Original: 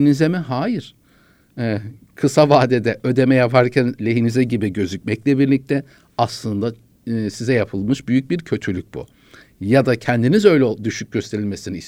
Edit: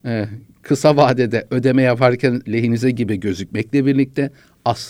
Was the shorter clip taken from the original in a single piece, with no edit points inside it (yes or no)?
yes